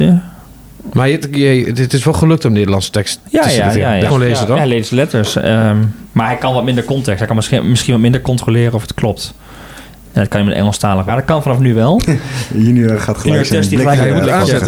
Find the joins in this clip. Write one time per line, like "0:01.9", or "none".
0:04.1
0:11.1